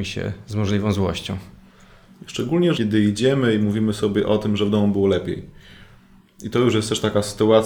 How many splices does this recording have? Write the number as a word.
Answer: one